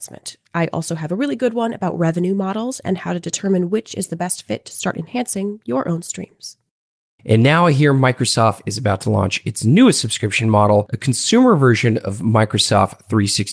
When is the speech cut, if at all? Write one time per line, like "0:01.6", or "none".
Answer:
none